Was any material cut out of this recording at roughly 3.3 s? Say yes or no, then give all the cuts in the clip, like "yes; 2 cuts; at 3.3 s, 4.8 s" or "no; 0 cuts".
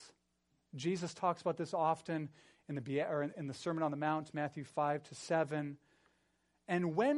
yes; 1 cut; at 3.3 s